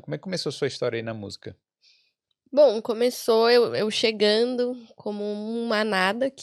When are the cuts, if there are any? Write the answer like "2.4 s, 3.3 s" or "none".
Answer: none